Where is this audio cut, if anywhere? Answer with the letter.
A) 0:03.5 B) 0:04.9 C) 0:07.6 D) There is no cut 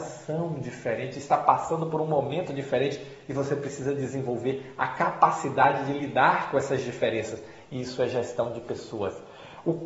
D